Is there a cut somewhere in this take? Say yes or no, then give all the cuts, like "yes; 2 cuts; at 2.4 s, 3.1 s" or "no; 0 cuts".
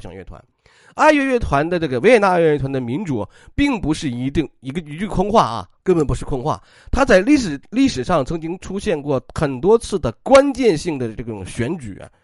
no; 0 cuts